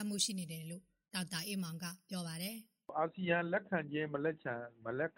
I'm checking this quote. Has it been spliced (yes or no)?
no